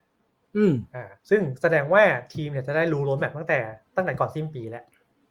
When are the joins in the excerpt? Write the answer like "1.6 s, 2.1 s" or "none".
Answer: 1.2 s, 3.9 s

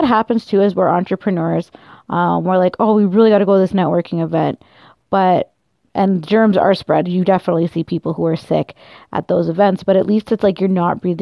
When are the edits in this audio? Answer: 5.8 s

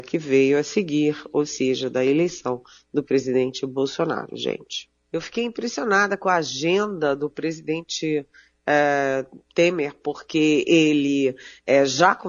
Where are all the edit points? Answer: 5.0 s

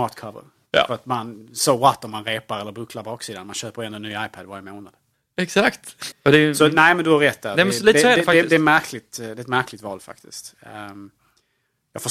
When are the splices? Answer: 6.1 s

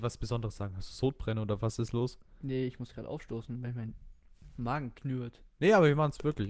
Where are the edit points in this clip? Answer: 5.6 s

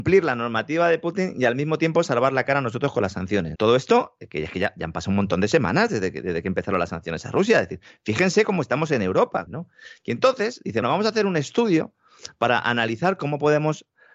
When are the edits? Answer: 3.5 s, 9.5 s, 10.8 s

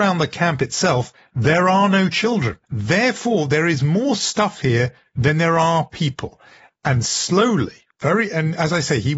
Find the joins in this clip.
2.6 s

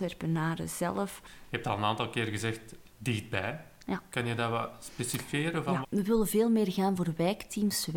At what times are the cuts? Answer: 5.8 s

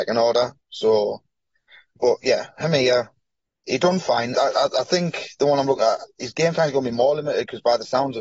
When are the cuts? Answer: 2.0 s, 4.3 s

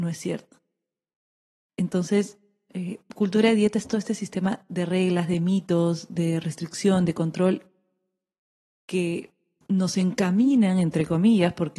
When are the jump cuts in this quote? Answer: 1.7 s

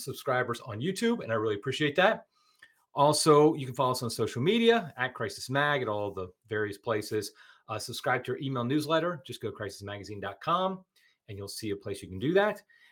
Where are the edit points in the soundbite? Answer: none

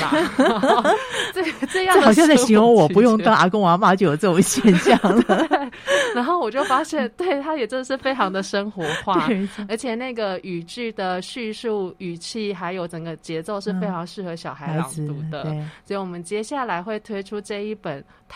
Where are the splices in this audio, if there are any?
none

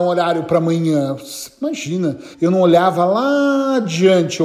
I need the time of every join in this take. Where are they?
2.3 s

